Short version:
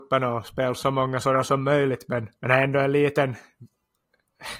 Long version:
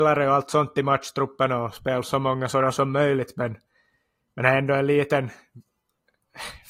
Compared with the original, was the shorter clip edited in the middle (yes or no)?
yes